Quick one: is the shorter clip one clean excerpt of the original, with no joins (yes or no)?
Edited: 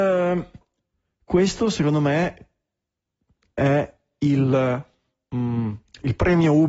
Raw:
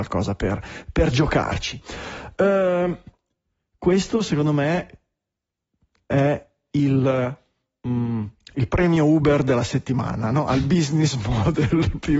yes